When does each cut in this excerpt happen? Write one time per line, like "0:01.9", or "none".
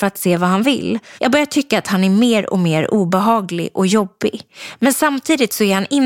0:01.2